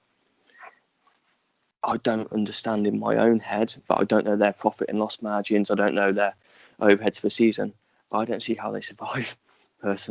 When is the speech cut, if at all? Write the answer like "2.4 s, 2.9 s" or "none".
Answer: none